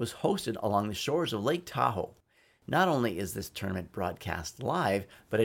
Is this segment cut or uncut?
uncut